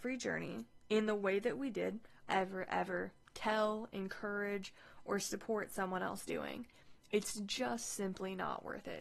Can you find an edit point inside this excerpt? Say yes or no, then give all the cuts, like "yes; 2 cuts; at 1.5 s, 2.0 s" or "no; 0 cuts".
yes; 1 cut; at 2.2 s